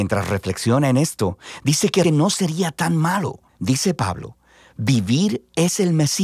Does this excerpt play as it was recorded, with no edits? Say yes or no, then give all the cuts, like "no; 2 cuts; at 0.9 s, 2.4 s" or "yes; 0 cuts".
no; 2 cuts; at 2.0 s, 3.5 s